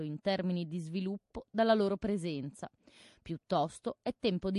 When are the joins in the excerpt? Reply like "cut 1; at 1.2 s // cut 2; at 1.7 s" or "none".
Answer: none